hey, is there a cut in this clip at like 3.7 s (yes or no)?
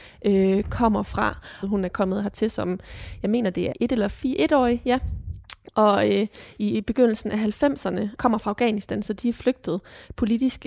yes